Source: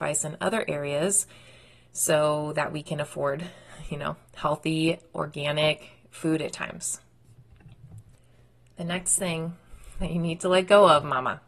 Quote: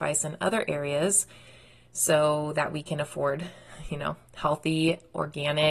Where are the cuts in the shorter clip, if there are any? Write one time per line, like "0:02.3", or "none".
none